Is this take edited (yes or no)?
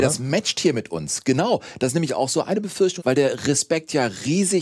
yes